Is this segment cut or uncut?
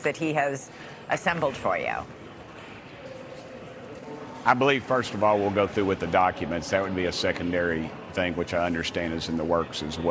uncut